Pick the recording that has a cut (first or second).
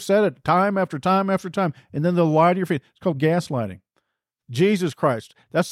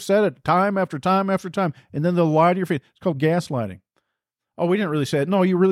first